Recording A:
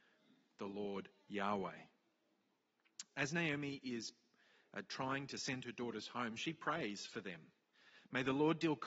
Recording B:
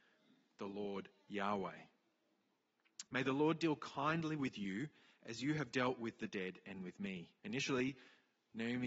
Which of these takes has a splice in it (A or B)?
B